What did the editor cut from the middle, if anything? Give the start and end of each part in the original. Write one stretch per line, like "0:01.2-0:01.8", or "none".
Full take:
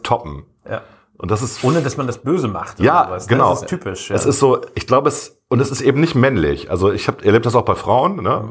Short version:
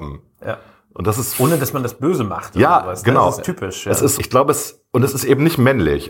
0:04.4-0:04.7